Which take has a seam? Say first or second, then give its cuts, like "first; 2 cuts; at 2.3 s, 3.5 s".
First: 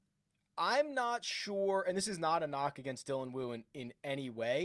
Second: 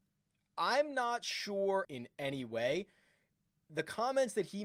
second; 1 cut; at 1.8 s